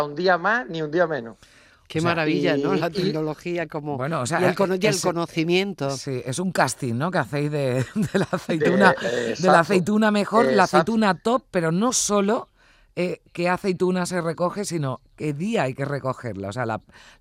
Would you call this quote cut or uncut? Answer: uncut